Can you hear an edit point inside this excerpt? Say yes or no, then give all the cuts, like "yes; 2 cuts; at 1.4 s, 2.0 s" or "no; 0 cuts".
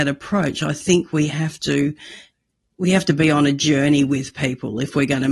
no; 0 cuts